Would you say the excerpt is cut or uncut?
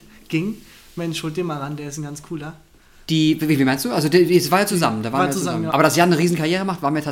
uncut